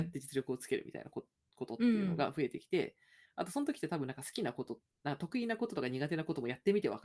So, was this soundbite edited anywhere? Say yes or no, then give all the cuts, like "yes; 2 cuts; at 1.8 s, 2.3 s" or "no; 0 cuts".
no; 0 cuts